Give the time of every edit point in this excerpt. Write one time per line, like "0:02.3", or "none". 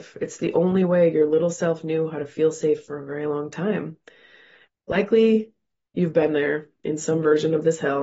0:04.7